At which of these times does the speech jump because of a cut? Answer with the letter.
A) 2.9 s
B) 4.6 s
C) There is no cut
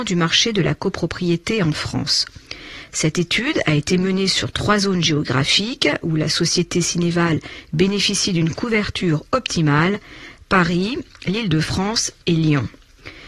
C